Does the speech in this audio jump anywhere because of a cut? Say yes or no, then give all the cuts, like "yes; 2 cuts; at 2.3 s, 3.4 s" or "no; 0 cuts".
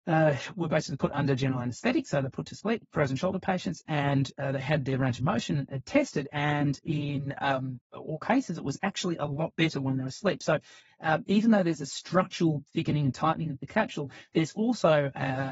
no; 0 cuts